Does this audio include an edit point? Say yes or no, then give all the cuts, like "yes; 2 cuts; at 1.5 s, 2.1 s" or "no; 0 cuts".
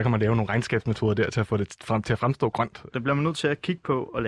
yes; 1 cut; at 2.9 s